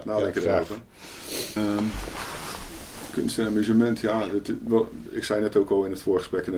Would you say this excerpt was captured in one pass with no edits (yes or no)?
no